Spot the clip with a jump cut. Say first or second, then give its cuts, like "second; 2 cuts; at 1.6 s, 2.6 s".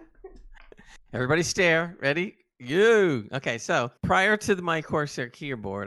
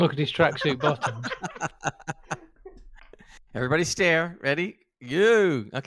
first; 1 cut; at 4.0 s